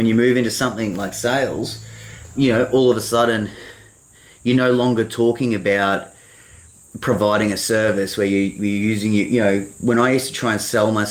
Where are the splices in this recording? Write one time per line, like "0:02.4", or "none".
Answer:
0:02.3
0:09.8